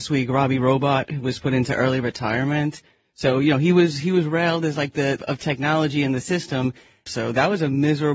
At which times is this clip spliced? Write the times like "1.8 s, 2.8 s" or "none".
5.2 s, 7.1 s

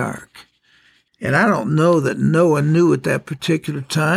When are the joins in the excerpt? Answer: 1.1 s

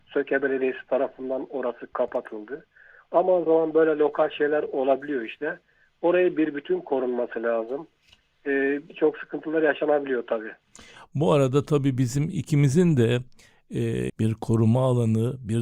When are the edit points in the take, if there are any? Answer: 3.5 s, 14.1 s

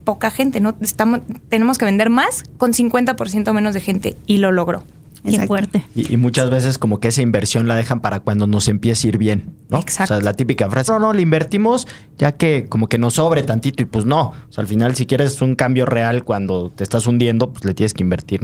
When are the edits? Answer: 10.9 s

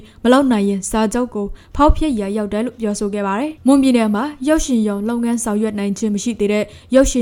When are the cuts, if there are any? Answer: none

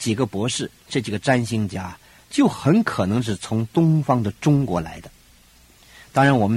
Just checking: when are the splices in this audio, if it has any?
none

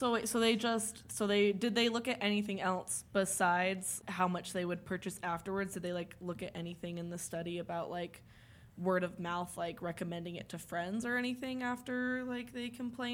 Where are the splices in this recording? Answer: none

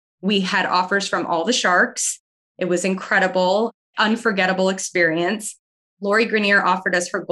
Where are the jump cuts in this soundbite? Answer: 3.9 s

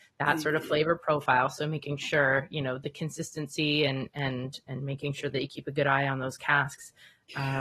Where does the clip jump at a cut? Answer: none

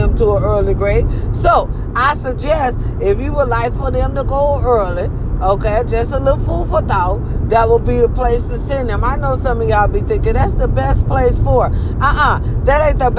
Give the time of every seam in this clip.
none

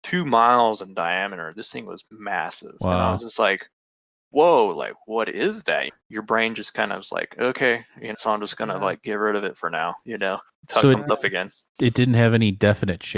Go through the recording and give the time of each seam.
5.9 s, 8.1 s

